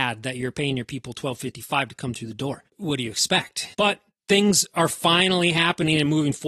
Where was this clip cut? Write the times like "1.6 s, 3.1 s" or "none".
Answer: 3.7 s